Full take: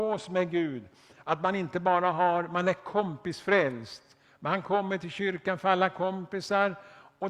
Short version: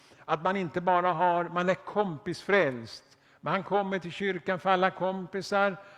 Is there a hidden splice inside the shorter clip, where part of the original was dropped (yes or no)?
no